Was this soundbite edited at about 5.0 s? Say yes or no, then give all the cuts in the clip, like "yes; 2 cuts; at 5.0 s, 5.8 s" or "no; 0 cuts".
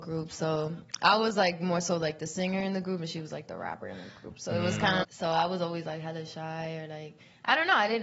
yes; 1 cut; at 5.0 s